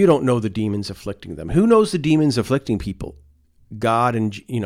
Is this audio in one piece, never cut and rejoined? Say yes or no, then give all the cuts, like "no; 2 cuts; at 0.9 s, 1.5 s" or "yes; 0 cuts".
yes; 0 cuts